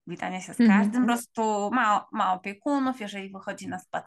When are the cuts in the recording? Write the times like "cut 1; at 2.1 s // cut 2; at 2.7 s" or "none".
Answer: cut 1; at 1.0 s